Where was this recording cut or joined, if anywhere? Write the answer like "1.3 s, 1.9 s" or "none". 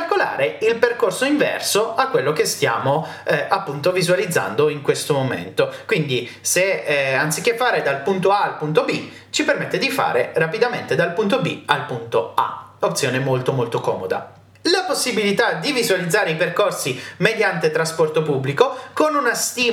14.5 s